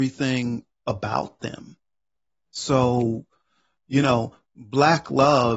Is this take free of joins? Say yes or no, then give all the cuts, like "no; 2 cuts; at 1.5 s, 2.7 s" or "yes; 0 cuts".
yes; 0 cuts